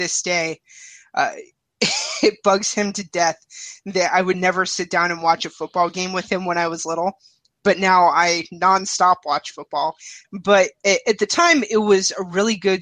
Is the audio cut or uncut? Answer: cut